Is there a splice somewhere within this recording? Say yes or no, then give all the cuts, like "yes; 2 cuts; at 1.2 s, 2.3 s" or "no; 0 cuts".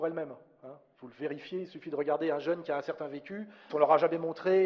yes; 1 cut; at 3.7 s